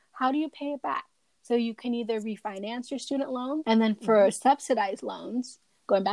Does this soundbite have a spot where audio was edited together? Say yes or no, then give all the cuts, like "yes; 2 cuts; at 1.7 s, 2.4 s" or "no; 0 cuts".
yes; 1 cut; at 3.6 s